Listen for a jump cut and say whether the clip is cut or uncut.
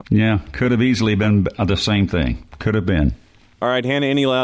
uncut